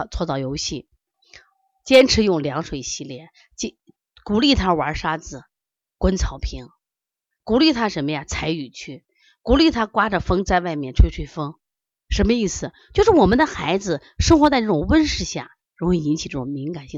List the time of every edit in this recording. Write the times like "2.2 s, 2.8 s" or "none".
12.0 s, 15.7 s